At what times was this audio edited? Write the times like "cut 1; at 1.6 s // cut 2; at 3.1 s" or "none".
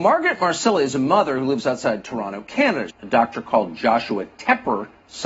cut 1; at 2.9 s